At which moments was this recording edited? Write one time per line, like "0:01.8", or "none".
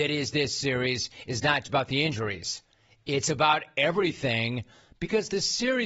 0:01.6